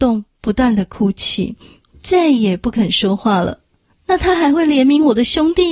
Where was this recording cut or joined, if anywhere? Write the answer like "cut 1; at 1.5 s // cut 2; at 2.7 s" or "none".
cut 1; at 3.9 s